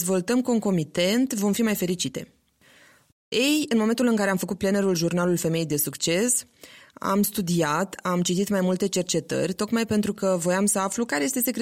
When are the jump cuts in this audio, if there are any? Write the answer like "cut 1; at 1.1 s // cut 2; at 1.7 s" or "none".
cut 1; at 3.1 s